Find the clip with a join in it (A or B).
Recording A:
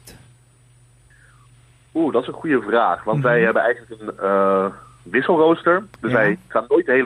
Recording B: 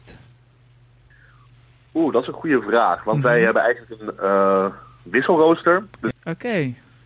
B